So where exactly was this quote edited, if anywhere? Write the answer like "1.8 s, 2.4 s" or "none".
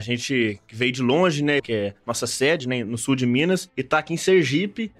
1.6 s